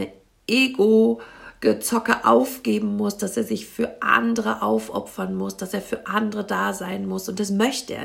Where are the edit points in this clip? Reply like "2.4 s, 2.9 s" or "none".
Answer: none